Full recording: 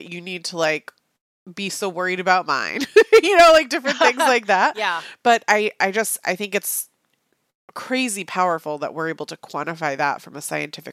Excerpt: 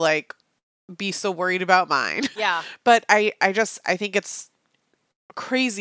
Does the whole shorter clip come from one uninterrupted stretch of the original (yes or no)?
no